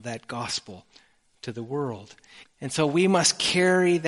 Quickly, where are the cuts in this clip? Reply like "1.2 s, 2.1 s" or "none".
2.4 s